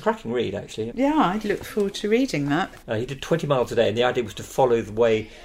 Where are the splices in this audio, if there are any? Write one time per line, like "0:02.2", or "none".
0:00.9
0:02.8

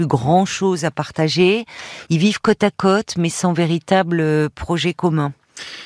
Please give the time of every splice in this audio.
none

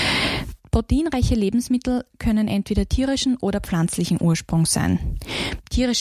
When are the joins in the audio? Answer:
none

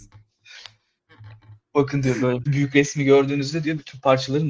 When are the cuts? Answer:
0:02.5

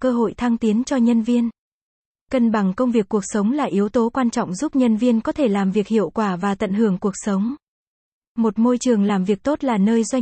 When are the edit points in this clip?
none

